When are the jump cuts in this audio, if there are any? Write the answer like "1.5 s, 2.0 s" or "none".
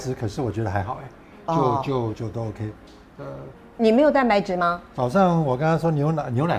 2.1 s